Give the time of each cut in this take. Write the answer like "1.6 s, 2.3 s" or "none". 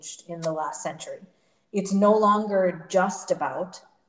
none